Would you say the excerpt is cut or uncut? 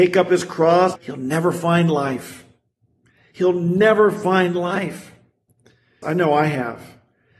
cut